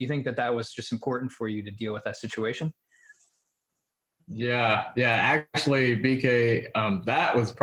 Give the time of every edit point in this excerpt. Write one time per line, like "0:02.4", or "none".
none